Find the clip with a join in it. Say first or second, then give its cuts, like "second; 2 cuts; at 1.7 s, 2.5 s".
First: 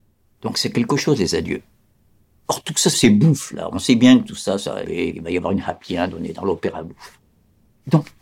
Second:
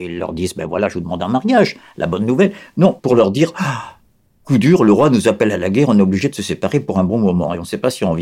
first; 2 cuts; at 2.9 s, 4.8 s